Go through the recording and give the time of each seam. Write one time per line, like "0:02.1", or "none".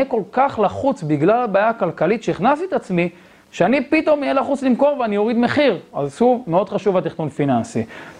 0:05.9